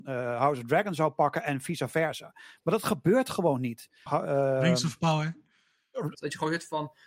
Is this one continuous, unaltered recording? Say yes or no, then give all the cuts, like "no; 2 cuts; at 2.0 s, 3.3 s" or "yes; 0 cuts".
no; 2 cuts; at 4.1 s, 6.1 s